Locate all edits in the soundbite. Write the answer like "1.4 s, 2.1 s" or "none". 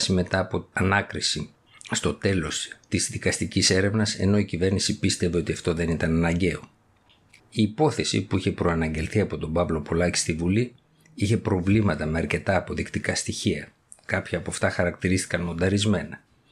7.4 s